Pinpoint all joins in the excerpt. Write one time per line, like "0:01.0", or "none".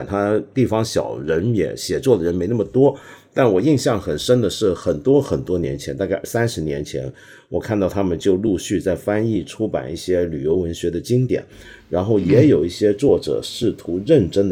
none